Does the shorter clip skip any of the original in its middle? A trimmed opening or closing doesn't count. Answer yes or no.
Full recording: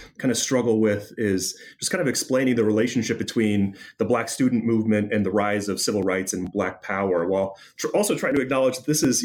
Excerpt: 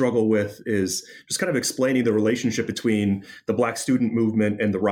no